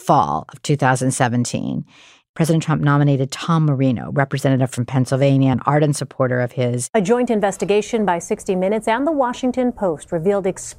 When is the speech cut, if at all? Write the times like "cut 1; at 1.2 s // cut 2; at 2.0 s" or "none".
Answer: cut 1; at 5.5 s // cut 2; at 6.9 s